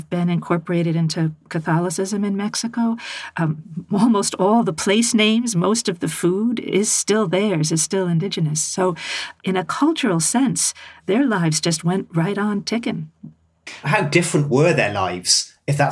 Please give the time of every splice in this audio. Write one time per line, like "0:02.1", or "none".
0:09.4
0:11.0
0:13.8